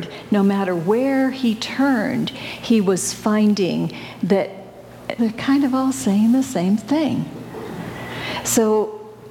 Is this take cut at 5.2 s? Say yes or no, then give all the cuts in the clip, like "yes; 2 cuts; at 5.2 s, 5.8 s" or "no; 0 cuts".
yes; 1 cut; at 5.2 s